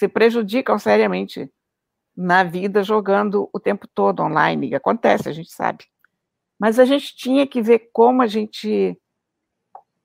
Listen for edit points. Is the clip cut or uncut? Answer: uncut